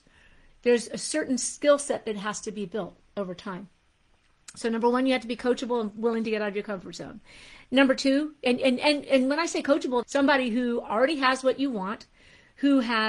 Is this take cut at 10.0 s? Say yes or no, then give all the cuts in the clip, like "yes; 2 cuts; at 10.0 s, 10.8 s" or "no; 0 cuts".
yes; 1 cut; at 10.0 s